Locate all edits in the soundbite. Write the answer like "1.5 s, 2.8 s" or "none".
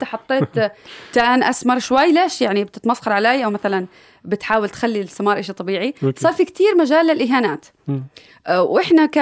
none